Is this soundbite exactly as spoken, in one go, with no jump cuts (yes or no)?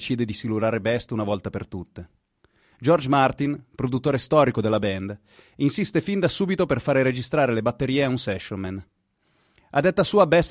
yes